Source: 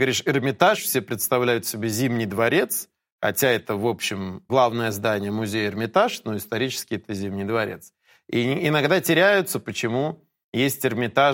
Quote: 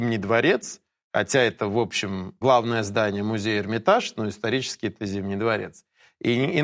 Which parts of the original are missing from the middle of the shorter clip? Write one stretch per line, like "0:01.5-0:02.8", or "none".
none